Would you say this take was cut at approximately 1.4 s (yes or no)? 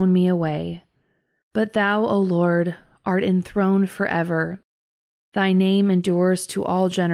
yes